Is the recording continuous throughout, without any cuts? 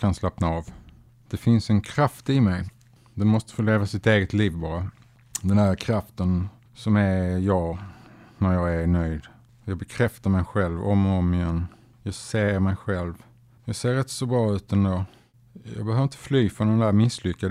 no; 1 cut; at 13.6 s

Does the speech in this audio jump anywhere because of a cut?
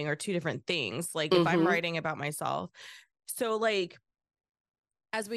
no; 0 cuts

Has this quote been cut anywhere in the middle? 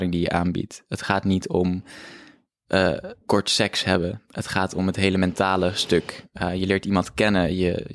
yes; 1 cut; at 3.2 s

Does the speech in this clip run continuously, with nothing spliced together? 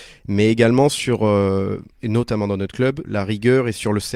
no; 1 cut; at 3.0 s

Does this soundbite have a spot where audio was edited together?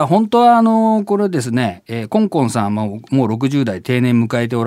no; 0 cuts

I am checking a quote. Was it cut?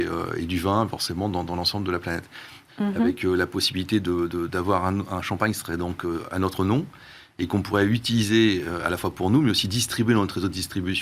yes; 1 cut; at 2.7 s

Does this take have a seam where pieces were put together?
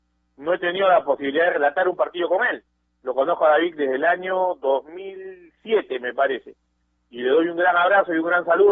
no; 0 cuts

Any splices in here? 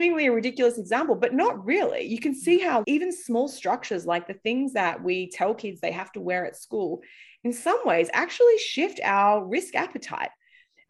yes; 1 cut; at 2.8 s

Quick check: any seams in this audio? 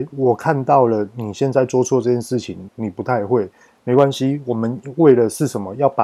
yes; 1 cut; at 2.7 s

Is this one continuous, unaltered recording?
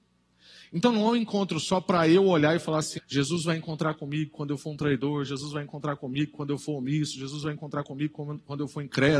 no; 1 cut; at 3.0 s

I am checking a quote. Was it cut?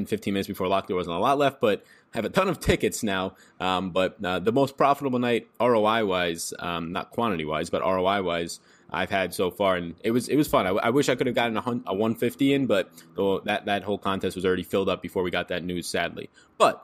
no; 0 cuts

